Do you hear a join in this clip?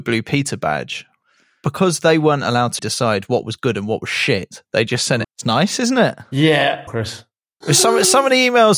yes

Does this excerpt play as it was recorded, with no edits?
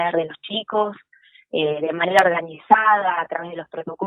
yes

